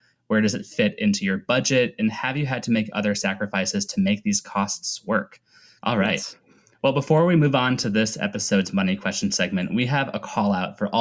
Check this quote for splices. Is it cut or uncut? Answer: cut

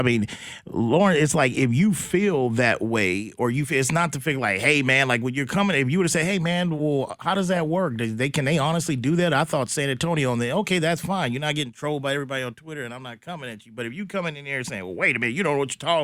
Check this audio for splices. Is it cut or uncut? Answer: uncut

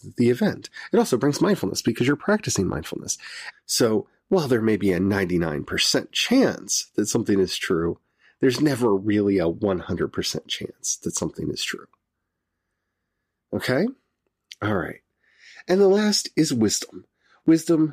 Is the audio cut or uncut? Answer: cut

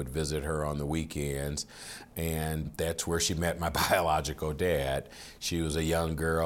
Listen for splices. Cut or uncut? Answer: uncut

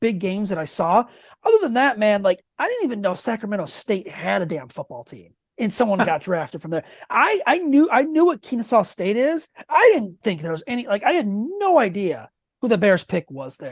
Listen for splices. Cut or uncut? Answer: uncut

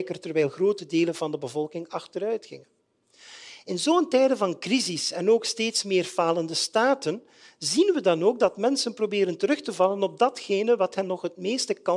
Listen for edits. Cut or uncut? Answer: uncut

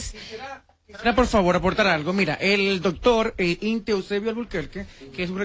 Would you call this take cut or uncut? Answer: uncut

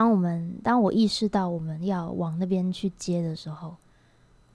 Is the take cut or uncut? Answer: uncut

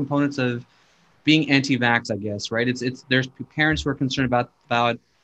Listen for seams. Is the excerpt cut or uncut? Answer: uncut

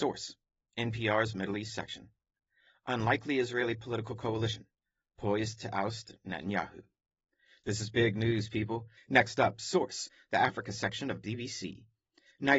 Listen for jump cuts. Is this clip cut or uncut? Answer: cut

